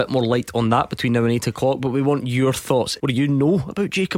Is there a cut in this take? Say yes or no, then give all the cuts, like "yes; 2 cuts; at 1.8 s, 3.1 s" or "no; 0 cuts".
yes; 1 cut; at 3.0 s